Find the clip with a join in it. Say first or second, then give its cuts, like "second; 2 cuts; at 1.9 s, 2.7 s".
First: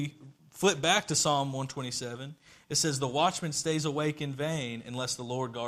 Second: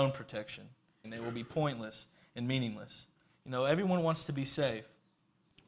second; 2 cuts; at 1.0 s, 3.3 s